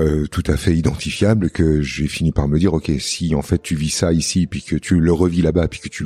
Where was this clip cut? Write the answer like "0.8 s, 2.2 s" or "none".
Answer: none

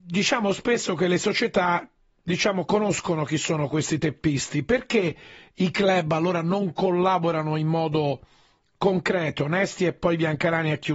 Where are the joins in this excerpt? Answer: none

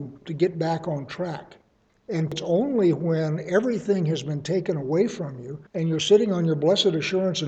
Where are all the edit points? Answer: 1.9 s, 5.7 s

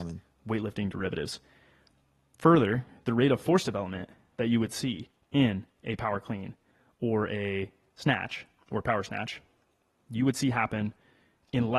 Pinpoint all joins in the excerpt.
none

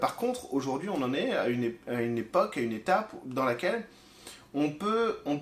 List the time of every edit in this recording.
none

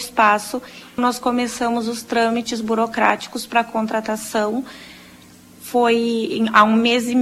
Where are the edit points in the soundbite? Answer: 1.0 s

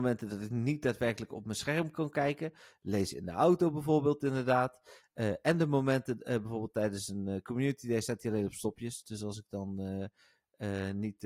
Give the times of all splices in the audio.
none

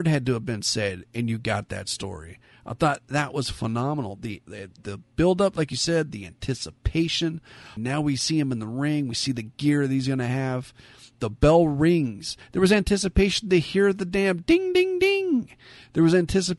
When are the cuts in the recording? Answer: 7.8 s

